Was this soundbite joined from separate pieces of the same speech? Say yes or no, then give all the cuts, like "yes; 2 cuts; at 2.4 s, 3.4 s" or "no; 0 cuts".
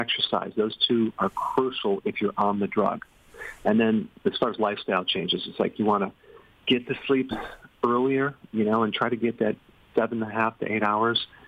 no; 0 cuts